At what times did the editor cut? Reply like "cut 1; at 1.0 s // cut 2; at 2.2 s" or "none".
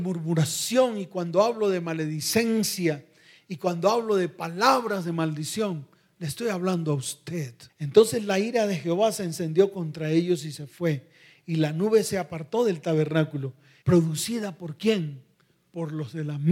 cut 1; at 7.7 s // cut 2; at 13.8 s

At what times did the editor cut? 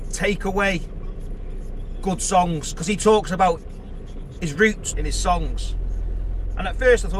cut 1; at 4.9 s

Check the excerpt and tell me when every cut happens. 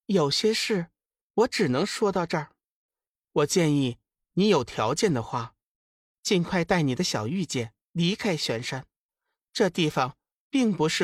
cut 1; at 3.1 s

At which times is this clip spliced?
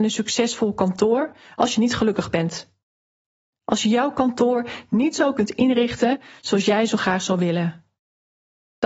none

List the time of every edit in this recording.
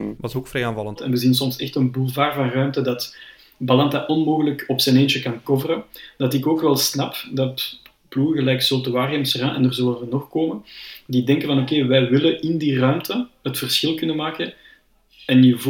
cut 1; at 1.0 s

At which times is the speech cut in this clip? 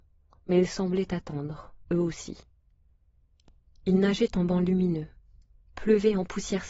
none

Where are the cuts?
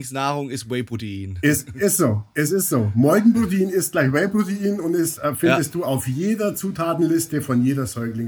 none

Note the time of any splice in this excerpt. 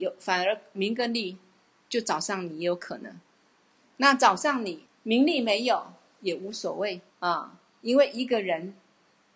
cut 1; at 4.9 s // cut 2; at 7.1 s

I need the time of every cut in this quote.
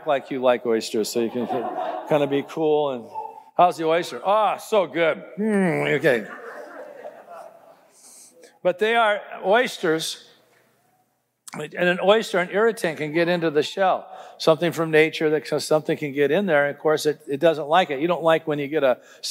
none

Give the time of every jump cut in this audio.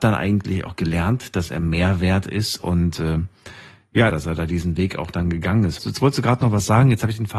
cut 1; at 4.1 s // cut 2; at 5.8 s

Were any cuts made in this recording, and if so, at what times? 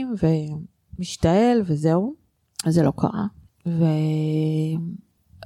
cut 1; at 3.5 s

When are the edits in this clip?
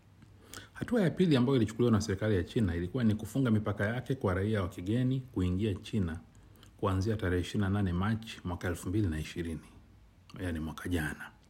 none

